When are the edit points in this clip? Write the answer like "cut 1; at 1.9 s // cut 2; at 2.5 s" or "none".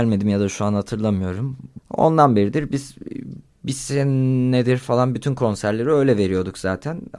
cut 1; at 1.8 s